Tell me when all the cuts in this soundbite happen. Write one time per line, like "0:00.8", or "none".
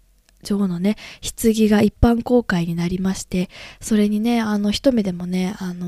none